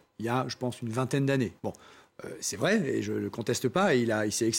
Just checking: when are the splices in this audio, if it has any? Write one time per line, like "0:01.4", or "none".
none